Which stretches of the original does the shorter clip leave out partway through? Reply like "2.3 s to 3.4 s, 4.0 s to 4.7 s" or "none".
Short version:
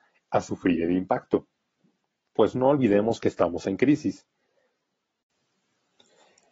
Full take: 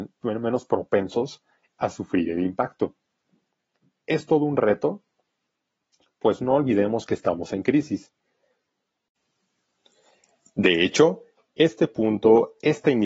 3.8 s to 6.1 s